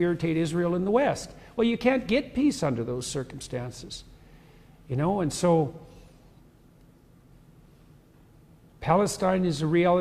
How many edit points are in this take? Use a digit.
0